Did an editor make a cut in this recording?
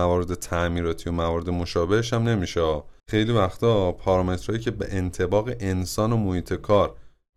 yes; 1 cut; at 3.0 s

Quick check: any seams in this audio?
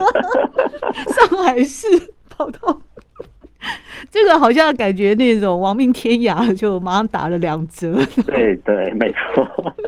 no; 0 cuts

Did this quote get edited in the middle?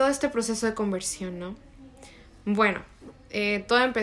no; 0 cuts

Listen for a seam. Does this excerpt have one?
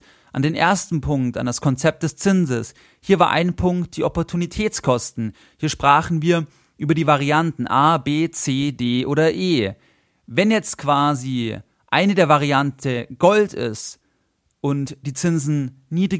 no; 0 cuts

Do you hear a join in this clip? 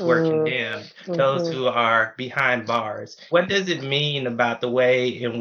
yes; 1 cut; at 3.3 s

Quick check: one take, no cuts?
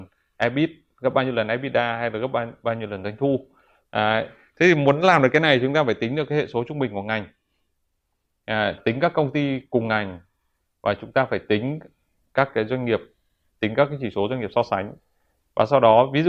no; 1 cut; at 8.8 s

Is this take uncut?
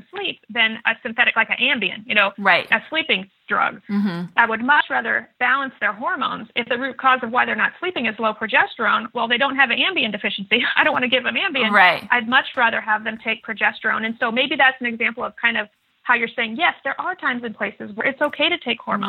yes; 0 cuts

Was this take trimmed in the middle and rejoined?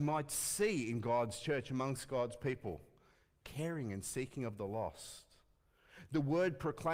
no; 0 cuts

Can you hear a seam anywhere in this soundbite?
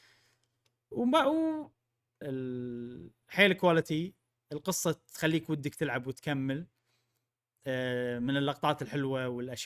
yes; 1 cut; at 2.2 s

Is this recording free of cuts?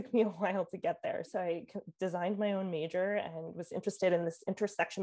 no; 1 cut; at 1.2 s

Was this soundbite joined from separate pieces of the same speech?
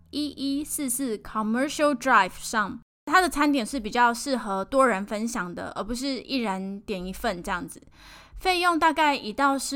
no; 0 cuts

